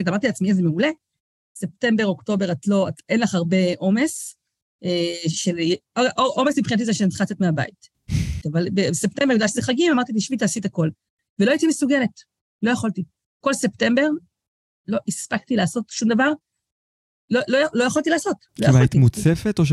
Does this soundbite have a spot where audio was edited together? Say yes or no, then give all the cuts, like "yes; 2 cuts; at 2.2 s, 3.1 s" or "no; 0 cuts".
yes; 1 cut; at 8.4 s